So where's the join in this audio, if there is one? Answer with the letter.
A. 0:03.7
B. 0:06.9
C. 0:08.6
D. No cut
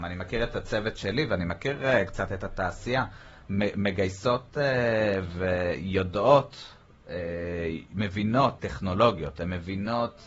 C